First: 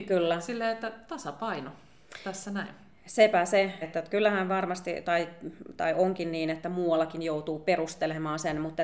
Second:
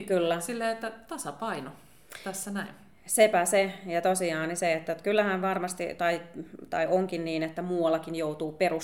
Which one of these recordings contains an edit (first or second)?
first